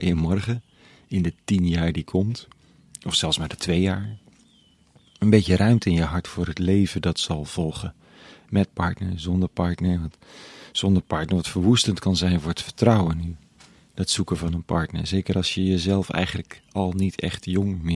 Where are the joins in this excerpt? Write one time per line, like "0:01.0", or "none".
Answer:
none

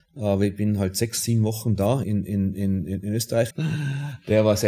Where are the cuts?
0:02.0
0:03.5

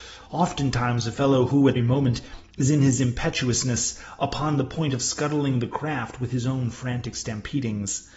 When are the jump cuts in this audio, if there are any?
0:01.8

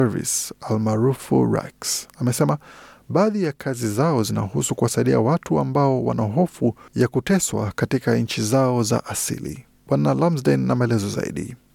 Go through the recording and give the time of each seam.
none

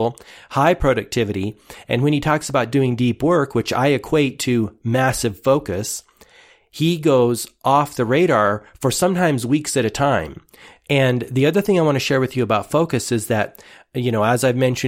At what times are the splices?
0:10.8

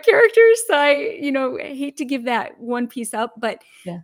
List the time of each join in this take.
none

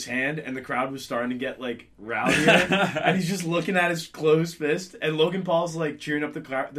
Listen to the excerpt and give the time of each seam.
none

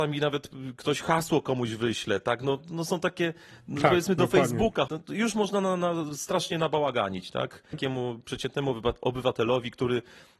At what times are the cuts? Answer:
0:04.9
0:07.7

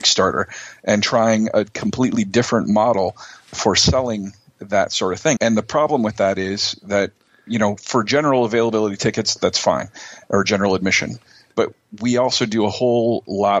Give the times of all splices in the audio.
0:05.4

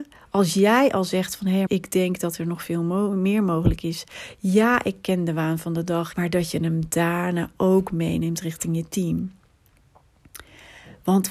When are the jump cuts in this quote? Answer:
0:01.7
0:06.1

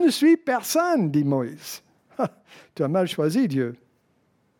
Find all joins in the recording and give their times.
none

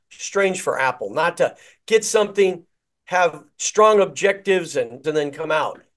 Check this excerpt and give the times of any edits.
0:05.0

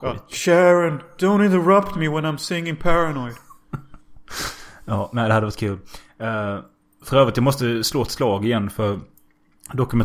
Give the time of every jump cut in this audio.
none

